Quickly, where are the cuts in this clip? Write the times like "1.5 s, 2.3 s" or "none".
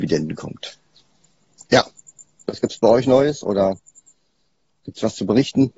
1.7 s